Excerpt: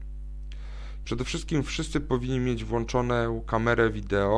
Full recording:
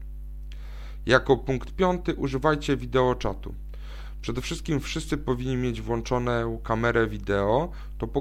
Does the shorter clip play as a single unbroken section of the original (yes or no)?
no